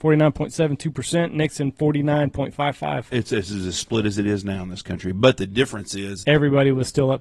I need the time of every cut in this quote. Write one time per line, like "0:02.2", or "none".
0:06.2

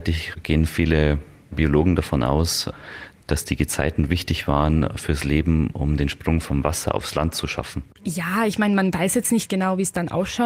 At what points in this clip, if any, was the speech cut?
0:08.0

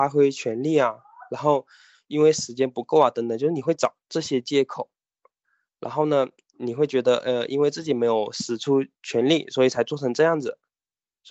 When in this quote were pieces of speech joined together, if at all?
none

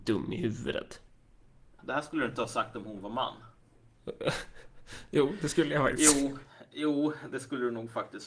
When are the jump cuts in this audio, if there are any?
0:01.8

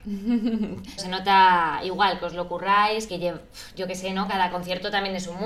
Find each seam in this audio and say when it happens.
0:01.0
0:03.1

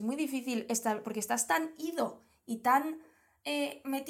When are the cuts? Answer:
none

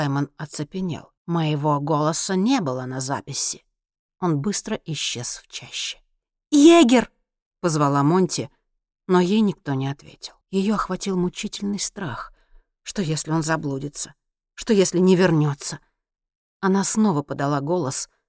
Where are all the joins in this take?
0:01.2
0:04.1
0:10.4

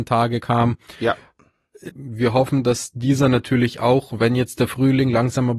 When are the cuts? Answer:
0:01.9

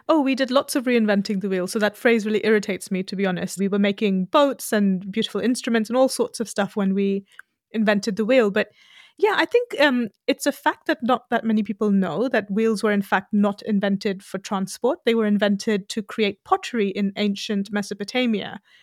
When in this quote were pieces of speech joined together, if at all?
0:03.6

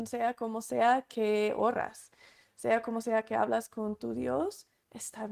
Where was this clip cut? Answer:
none

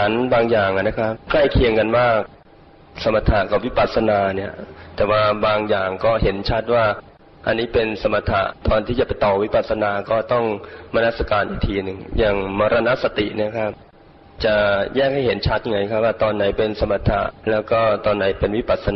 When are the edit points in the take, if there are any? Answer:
0:01.2
0:08.6
0:17.4

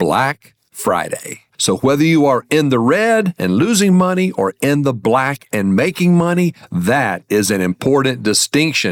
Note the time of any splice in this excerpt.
0:01.5

